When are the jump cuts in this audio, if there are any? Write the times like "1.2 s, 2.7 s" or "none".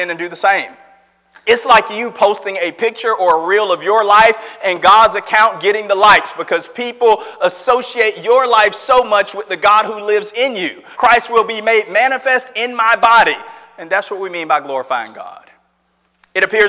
10.9 s